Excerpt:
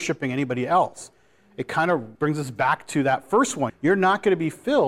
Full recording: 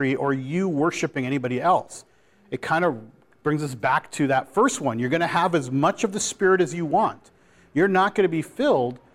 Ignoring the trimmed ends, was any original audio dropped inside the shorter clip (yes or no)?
yes